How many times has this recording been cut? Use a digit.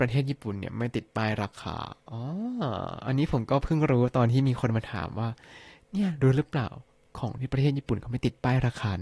0